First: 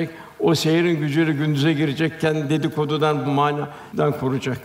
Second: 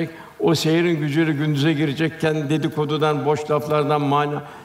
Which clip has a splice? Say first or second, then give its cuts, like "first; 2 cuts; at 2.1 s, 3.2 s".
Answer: first; 1 cut; at 3.2 s